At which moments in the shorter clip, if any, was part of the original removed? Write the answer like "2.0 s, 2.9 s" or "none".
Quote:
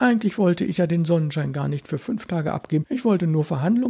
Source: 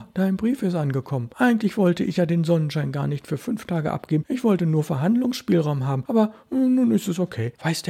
none